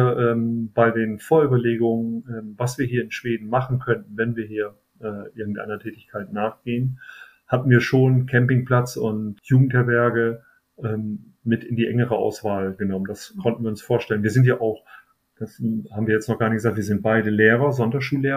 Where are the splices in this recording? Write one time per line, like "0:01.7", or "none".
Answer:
none